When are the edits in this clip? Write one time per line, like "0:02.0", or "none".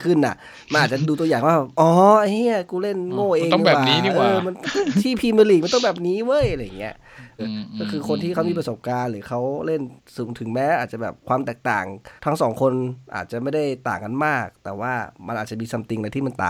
0:07.4
0:12.2